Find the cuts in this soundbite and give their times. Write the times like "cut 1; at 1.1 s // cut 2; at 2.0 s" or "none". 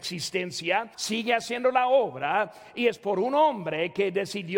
cut 1; at 0.9 s